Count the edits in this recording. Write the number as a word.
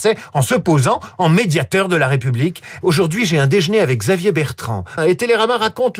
two